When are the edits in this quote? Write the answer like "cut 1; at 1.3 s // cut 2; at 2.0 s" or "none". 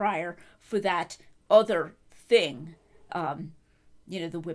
cut 1; at 3.1 s